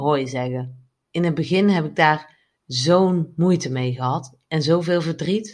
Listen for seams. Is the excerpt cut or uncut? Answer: cut